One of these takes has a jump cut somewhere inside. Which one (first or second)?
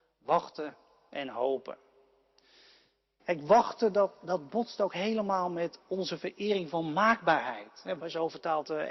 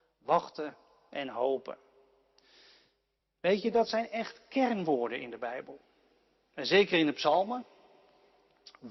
first